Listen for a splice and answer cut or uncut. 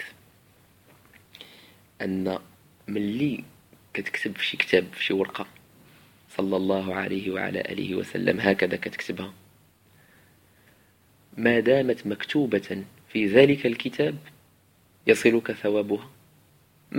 uncut